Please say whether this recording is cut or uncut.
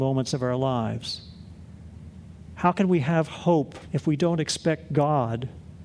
cut